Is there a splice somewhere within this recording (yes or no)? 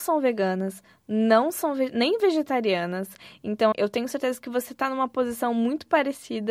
yes